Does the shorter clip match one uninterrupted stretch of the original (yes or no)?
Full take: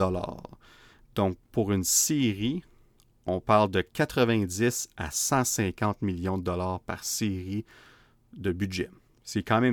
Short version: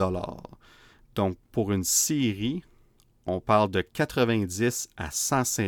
yes